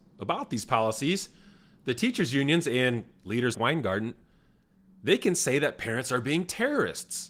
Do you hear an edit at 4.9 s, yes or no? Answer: no